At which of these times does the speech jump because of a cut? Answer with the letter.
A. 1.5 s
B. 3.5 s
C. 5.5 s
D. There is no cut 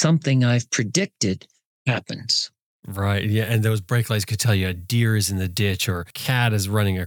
D